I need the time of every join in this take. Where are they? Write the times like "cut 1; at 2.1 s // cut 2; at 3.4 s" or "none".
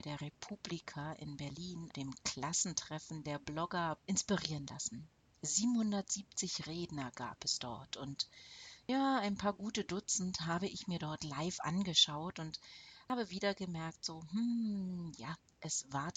cut 1; at 1.9 s // cut 2; at 4.0 s